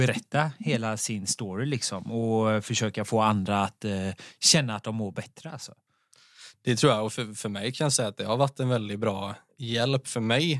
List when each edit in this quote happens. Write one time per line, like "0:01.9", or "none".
none